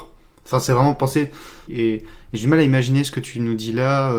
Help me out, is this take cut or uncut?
cut